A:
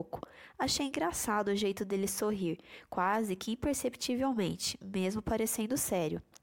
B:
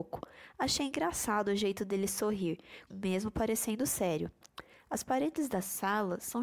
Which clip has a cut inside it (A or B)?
B